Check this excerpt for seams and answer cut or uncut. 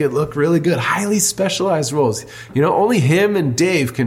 uncut